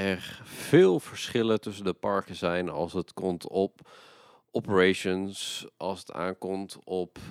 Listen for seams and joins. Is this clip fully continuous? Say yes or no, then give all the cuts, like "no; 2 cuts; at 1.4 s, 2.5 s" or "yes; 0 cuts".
yes; 0 cuts